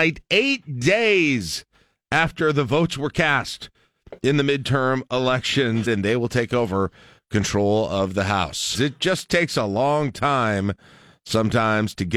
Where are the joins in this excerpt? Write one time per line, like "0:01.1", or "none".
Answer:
0:05.9
0:08.7